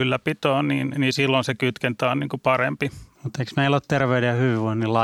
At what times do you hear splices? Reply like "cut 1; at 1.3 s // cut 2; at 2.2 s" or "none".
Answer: cut 1; at 3.2 s